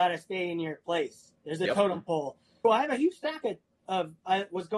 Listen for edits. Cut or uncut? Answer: cut